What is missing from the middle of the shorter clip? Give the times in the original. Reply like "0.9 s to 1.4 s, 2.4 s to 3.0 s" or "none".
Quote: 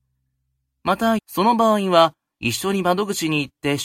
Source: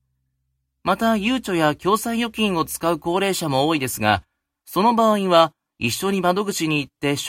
1.2 s to 4.6 s